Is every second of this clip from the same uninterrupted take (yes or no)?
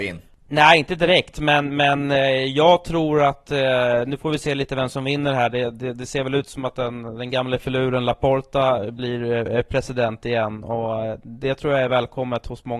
yes